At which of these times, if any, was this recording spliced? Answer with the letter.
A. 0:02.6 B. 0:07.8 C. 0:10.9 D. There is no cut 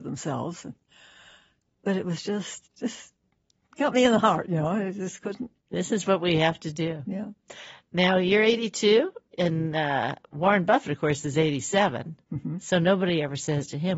A